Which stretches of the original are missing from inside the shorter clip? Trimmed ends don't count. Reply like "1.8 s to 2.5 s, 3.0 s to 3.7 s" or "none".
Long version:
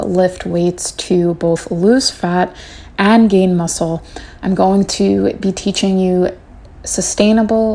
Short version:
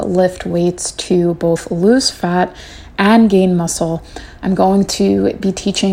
none